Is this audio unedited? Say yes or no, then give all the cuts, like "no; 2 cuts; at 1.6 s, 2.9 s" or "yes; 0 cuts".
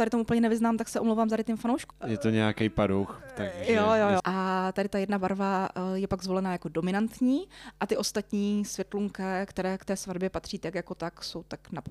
no; 2 cuts; at 1.9 s, 4.2 s